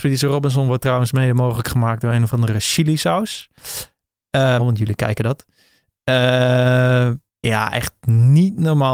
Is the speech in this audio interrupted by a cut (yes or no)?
yes